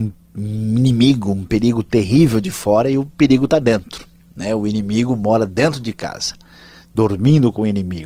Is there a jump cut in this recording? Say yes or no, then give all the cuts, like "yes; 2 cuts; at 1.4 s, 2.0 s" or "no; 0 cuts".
no; 0 cuts